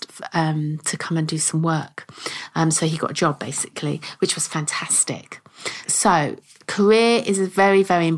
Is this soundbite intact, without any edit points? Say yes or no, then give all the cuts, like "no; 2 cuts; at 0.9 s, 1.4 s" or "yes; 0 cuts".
no; 1 cut; at 5.8 s